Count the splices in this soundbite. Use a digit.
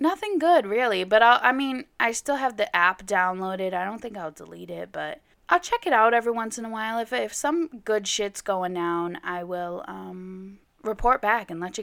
0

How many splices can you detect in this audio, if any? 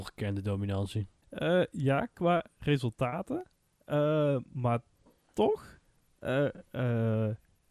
0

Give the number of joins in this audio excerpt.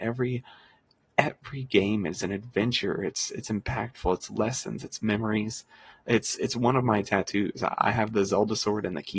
0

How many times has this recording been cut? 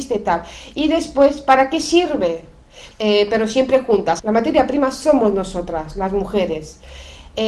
2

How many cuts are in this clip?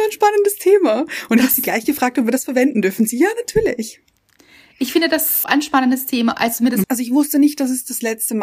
2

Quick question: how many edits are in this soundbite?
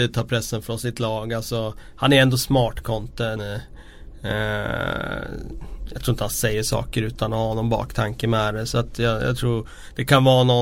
1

